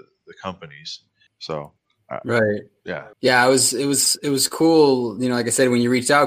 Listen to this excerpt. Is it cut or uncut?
cut